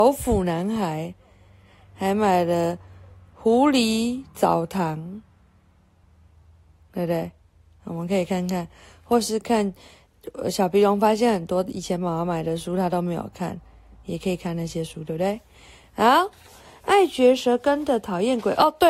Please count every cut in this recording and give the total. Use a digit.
1